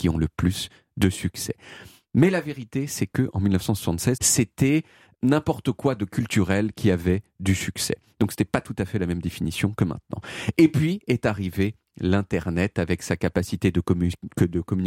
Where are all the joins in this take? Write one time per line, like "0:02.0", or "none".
0:04.2